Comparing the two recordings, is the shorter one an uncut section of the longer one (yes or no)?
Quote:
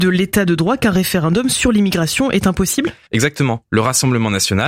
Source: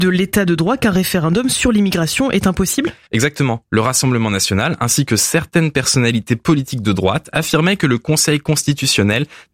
yes